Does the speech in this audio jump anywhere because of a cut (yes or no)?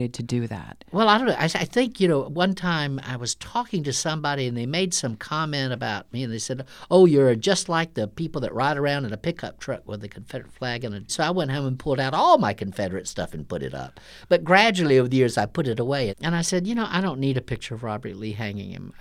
yes